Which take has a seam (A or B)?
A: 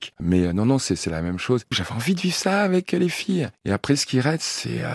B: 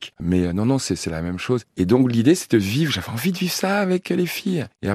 A